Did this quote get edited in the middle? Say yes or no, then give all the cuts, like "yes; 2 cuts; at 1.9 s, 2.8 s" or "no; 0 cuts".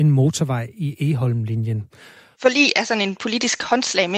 yes; 1 cut; at 2.3 s